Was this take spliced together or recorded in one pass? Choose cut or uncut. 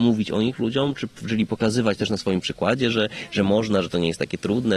uncut